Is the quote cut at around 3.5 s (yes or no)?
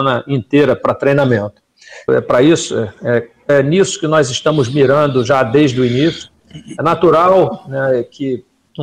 yes